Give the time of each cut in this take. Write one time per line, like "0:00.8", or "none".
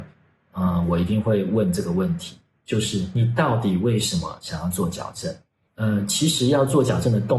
0:05.7